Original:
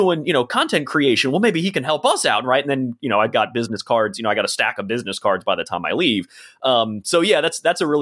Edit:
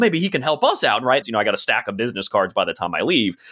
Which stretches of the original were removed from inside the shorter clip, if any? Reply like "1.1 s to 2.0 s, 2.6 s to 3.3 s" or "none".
2.6 s to 4.1 s